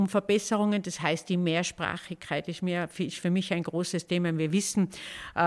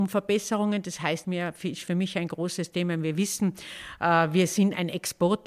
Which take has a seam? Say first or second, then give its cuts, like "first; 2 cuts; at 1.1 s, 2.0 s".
second; 1 cut; at 1.2 s